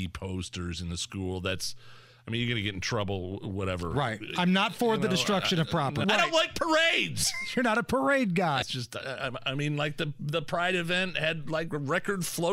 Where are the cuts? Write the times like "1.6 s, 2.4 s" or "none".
6.0 s, 8.6 s

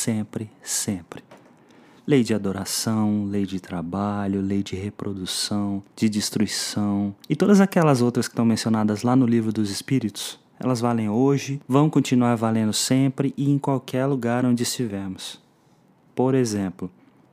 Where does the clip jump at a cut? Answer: 5.9 s, 7.2 s, 11.6 s

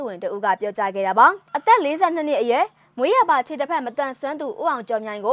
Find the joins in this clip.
1.5 s

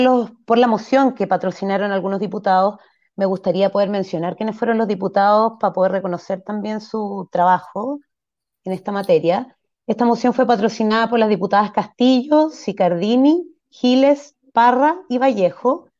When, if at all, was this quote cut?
none

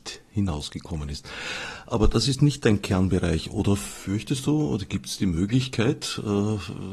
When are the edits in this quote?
none

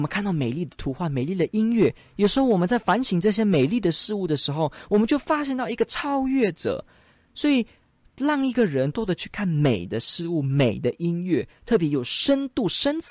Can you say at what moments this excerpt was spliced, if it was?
8.9 s

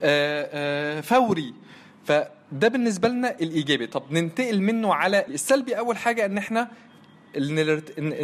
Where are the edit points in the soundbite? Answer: 5.3 s

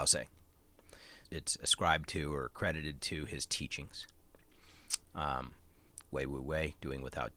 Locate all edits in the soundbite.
1.2 s, 6.0 s

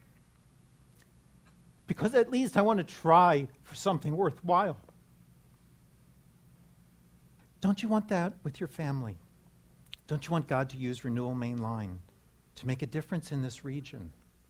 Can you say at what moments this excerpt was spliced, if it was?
1.8 s, 7.4 s, 10.0 s

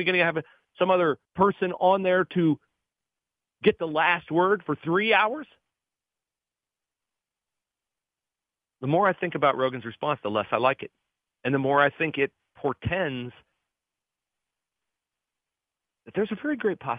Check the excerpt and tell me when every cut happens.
1.2 s

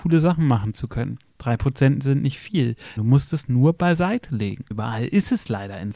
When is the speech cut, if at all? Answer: 3.0 s, 4.7 s

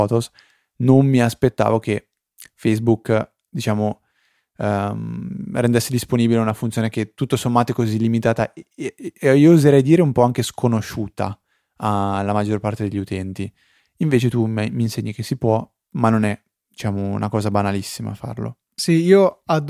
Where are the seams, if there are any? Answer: none

